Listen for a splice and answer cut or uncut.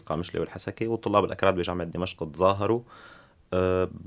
uncut